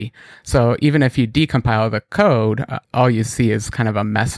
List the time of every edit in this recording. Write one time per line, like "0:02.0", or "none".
0:02.8